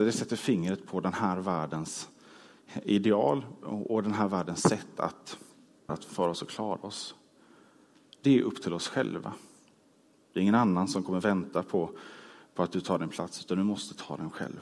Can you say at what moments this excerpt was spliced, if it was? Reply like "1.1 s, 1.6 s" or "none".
5.9 s